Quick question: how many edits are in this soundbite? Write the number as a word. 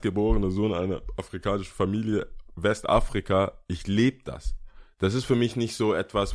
zero